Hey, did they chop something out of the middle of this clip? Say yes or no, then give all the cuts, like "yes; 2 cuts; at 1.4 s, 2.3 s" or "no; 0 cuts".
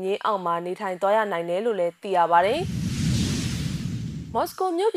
no; 0 cuts